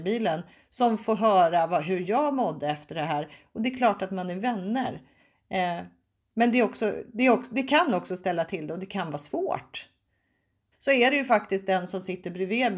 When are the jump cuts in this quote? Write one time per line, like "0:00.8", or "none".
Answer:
0:10.7